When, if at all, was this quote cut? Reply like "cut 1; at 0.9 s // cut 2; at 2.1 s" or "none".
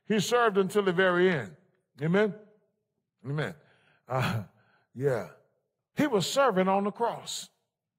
cut 1; at 5.8 s